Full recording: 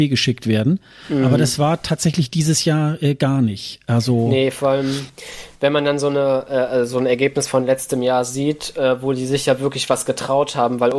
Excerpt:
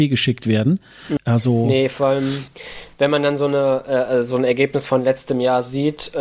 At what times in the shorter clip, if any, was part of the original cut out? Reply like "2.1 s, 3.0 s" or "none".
1.2 s